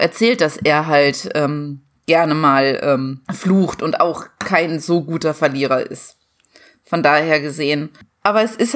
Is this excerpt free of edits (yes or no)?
yes